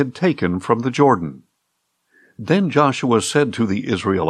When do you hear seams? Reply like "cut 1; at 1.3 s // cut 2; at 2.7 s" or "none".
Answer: none